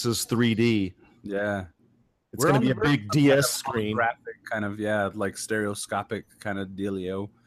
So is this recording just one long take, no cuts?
yes; 0 cuts

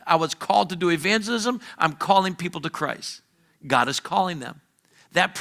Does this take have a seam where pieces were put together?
no; 0 cuts

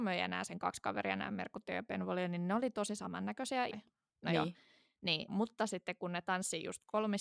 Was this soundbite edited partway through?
yes; 2 cuts; at 3.7 s, 5.3 s

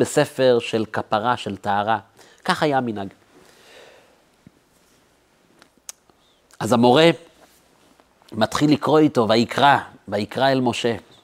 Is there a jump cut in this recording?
no; 0 cuts

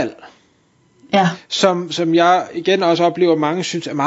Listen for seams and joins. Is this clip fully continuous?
yes; 0 cuts

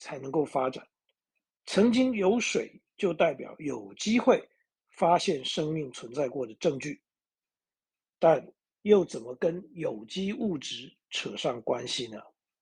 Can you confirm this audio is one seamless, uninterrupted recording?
no; 1 cut; at 8.6 s

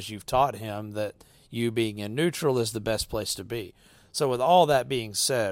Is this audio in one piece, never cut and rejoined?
yes; 0 cuts

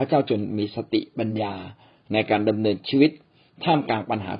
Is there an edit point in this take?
no; 0 cuts

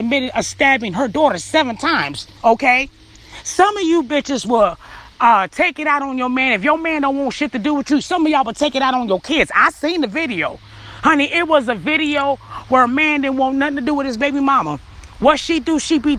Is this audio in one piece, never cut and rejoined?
no; 1 cut; at 2.4 s

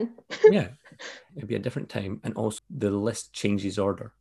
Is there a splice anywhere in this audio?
yes; 2 cuts; at 1.3 s, 2.6 s

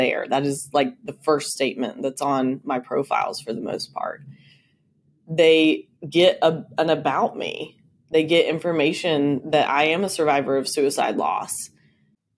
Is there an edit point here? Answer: yes; 1 cut; at 6.0 s

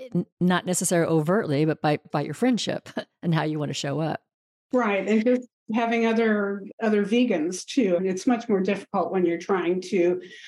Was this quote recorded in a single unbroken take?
no; 2 cuts; at 2.1 s, 8.0 s

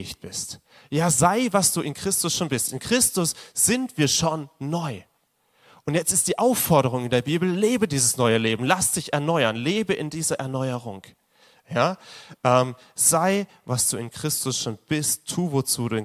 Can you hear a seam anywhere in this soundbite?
no; 0 cuts

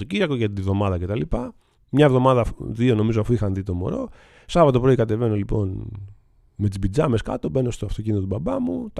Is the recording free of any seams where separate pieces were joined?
no; 1 cut; at 1.7 s

